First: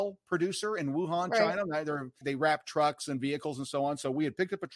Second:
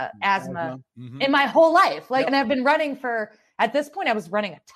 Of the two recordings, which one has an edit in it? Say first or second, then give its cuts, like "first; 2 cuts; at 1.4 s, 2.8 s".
first; 1 cut; at 2.2 s